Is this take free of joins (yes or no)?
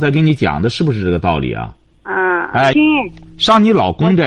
no